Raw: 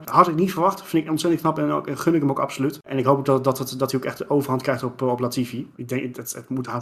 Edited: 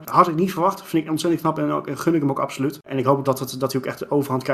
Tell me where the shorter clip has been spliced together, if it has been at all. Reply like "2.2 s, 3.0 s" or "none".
3.2 s